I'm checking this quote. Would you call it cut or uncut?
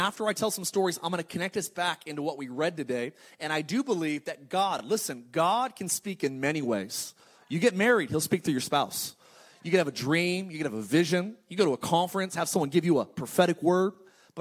uncut